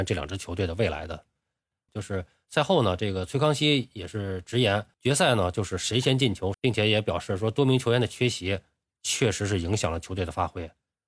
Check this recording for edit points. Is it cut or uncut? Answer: cut